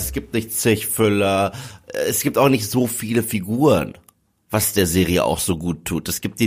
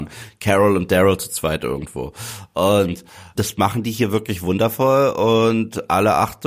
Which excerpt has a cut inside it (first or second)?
second